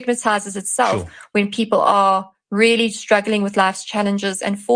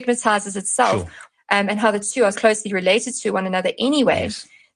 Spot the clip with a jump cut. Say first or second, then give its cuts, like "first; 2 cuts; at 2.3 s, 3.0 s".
second; 2 cuts; at 1.3 s, 2.3 s